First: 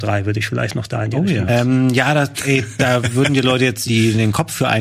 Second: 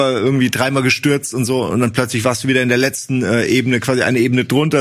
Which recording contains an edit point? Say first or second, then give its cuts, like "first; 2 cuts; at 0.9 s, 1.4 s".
first; 2 cuts; at 1.5 s, 3.9 s